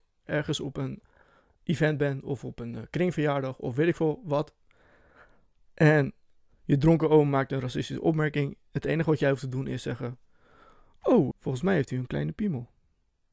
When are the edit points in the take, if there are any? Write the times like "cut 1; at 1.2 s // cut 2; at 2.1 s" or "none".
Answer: cut 1; at 11.3 s